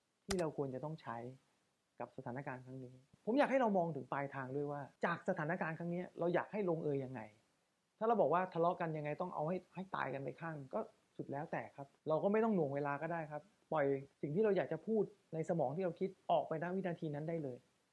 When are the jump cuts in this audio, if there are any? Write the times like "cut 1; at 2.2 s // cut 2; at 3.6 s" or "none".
cut 1; at 12.0 s // cut 2; at 14.1 s

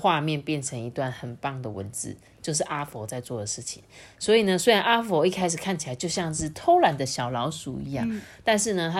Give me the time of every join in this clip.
none

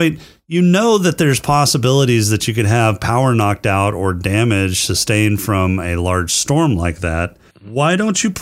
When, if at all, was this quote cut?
cut 1; at 7.5 s

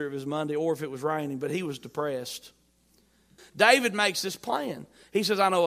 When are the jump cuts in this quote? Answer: cut 1; at 3.4 s

